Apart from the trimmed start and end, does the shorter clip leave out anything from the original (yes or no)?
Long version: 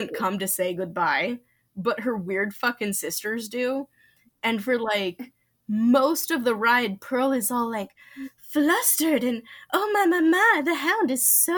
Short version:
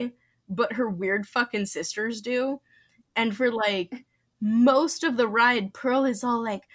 no